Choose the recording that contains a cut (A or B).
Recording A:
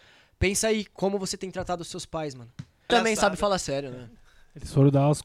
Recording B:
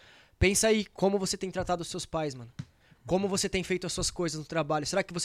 A